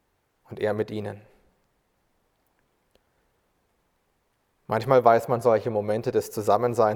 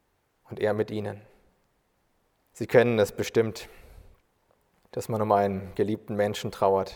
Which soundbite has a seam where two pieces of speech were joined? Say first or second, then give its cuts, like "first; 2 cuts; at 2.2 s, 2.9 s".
second; 1 cut; at 2.5 s